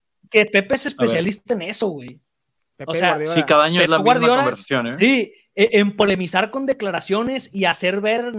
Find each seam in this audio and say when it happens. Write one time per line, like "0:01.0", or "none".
none